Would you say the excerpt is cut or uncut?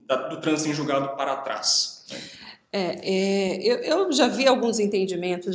uncut